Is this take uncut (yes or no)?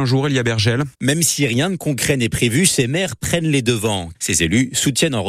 no